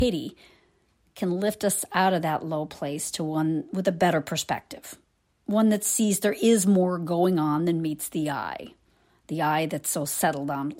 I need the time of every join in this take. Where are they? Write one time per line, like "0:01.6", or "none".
none